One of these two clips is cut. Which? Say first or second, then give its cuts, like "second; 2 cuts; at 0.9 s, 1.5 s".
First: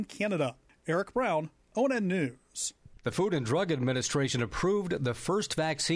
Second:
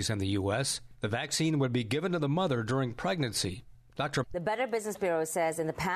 second; 1 cut; at 4.2 s